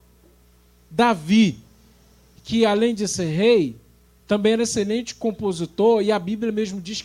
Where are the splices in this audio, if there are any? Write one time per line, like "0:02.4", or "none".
none

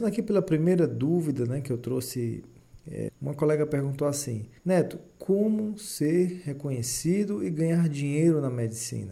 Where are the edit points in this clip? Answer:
0:03.1
0:04.6

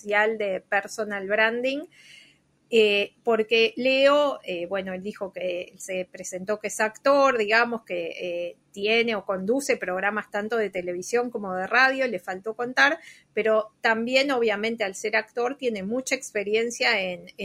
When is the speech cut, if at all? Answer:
none

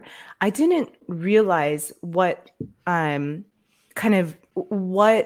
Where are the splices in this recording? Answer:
none

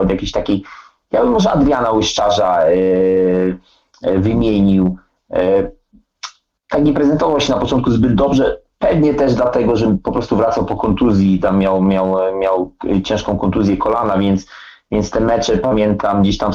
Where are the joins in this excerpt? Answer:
none

